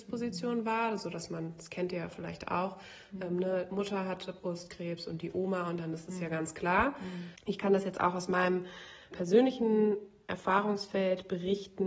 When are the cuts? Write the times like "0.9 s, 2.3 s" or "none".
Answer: 7.4 s, 9.1 s